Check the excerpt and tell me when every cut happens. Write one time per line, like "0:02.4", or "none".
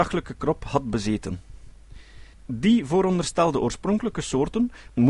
0:02.3